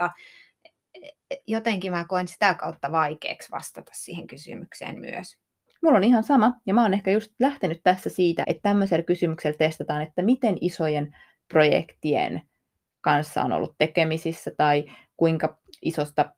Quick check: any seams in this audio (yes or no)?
yes